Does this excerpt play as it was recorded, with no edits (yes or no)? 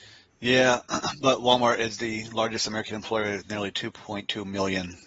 yes